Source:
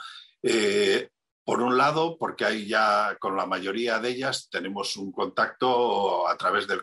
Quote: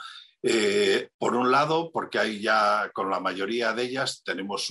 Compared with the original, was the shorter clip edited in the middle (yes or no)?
yes